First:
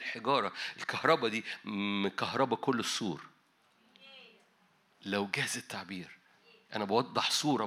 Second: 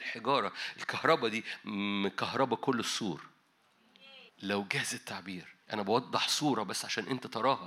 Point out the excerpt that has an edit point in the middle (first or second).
second